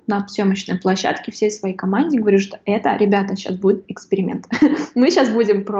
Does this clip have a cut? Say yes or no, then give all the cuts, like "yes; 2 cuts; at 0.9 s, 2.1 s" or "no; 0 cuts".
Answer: no; 0 cuts